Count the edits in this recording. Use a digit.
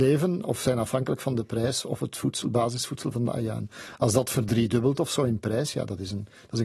0